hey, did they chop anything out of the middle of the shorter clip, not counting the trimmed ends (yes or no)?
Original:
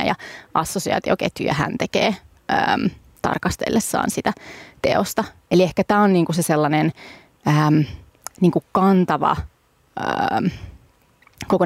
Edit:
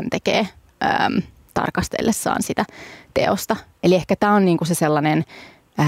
no